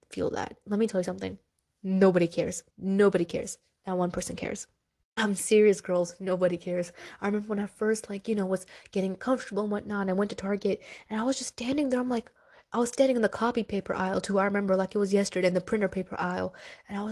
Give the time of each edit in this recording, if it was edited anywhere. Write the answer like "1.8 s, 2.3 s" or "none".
2.7 s